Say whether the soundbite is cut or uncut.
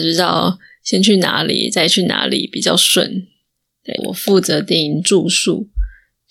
cut